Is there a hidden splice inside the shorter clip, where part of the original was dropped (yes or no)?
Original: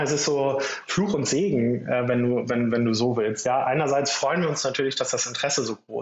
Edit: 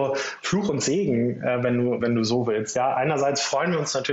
yes